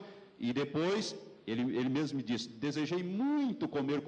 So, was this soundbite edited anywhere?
no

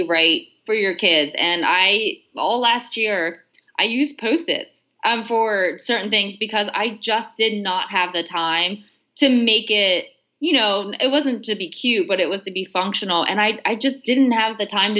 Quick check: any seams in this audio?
no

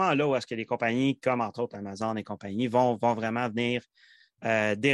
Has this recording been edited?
no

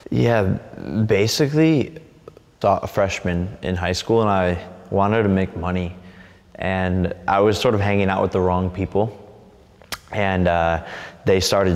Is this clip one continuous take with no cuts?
no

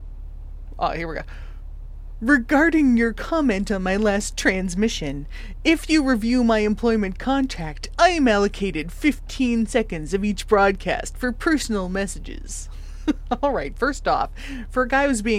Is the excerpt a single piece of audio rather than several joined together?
yes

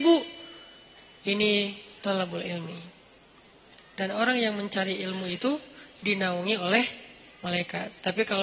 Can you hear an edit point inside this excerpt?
no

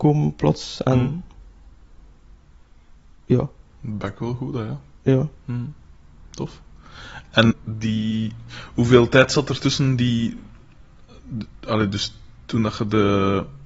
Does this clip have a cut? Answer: yes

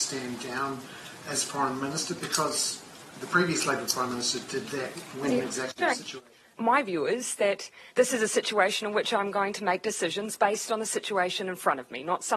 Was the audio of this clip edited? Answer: yes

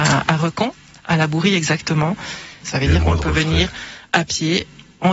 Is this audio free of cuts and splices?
no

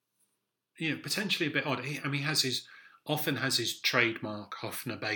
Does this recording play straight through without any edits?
yes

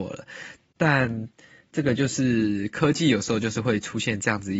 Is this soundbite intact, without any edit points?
yes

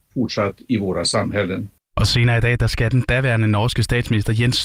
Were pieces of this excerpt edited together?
no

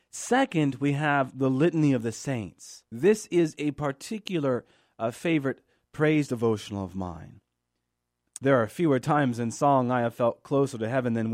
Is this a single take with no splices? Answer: no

